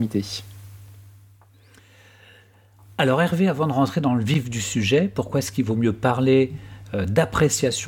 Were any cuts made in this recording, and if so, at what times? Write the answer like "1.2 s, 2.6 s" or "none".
none